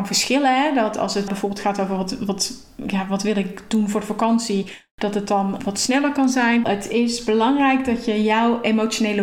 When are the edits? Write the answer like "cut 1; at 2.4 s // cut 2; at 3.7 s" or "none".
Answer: cut 1; at 1.3 s // cut 2; at 6.6 s

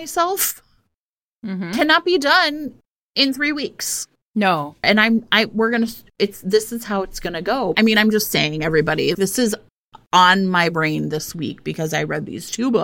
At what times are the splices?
cut 1; at 4.8 s // cut 2; at 7.7 s // cut 3; at 9.1 s

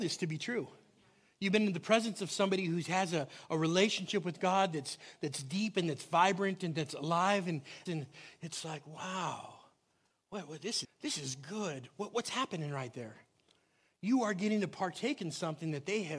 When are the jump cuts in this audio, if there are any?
cut 1; at 7.9 s // cut 2; at 10.8 s

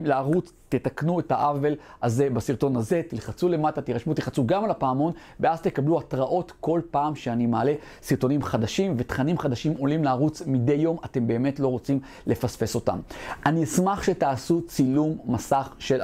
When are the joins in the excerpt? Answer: none

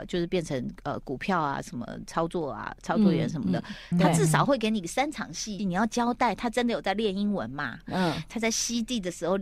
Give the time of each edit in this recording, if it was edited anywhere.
cut 1; at 3.9 s // cut 2; at 5.6 s

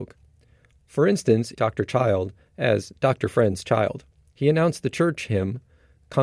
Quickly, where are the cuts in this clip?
cut 1; at 1.5 s // cut 2; at 4.3 s

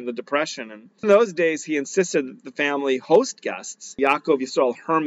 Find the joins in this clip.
cut 1; at 1.0 s // cut 2; at 4.0 s

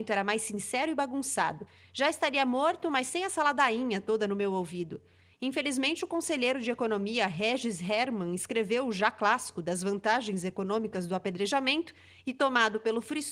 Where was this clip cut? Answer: none

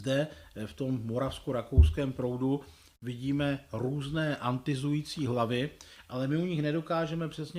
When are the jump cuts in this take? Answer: none

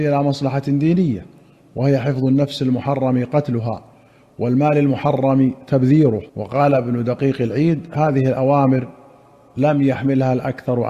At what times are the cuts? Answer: cut 1; at 6.3 s

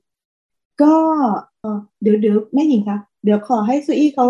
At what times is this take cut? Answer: cut 1; at 1.6 s

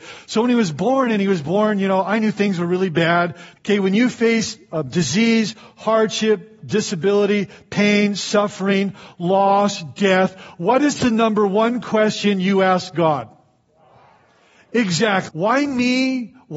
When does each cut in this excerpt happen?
cut 1; at 3.6 s // cut 2; at 15.3 s

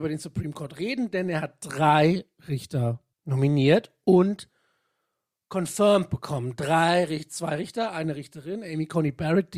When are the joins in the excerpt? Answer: cut 1; at 3.1 s

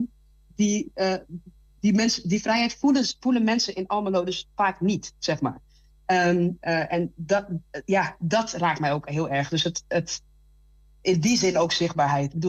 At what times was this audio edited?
none

